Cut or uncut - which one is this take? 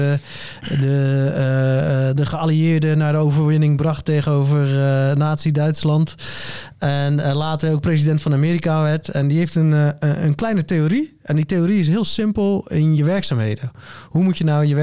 uncut